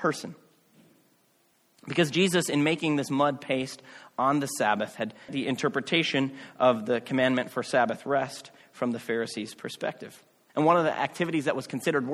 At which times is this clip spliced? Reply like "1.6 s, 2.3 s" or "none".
1.8 s, 5.3 s